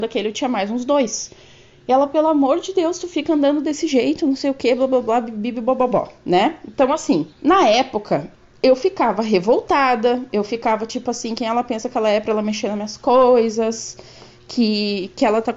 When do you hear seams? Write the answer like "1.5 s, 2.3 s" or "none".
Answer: 7.3 s